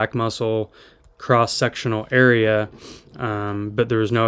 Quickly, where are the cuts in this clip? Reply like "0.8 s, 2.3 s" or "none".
none